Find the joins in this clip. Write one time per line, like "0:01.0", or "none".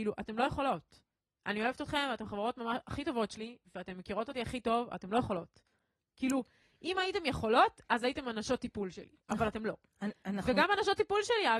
none